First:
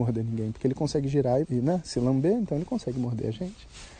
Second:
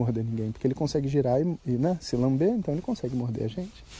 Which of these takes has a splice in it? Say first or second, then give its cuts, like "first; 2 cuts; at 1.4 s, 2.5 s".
first; 1 cut; at 1.4 s